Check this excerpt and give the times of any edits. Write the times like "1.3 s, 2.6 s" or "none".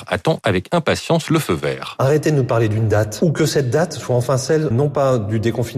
4.7 s